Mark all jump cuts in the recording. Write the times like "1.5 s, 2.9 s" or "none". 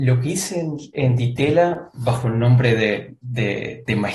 none